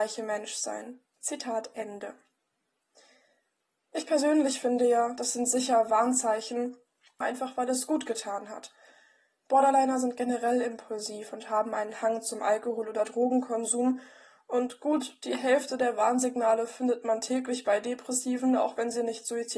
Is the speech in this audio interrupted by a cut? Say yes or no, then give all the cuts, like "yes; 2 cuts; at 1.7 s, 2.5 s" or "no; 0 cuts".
yes; 2 cuts; at 1.1 s, 7.2 s